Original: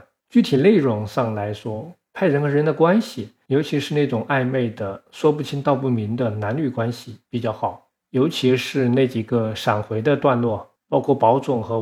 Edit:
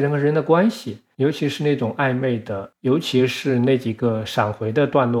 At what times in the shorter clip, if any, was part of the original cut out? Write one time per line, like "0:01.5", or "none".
0:02.7